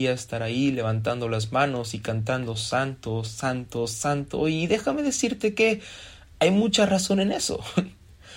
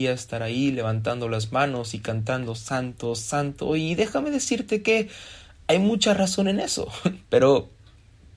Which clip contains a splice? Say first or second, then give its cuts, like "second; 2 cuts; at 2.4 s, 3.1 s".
second; 2 cuts; at 2.5 s, 7.2 s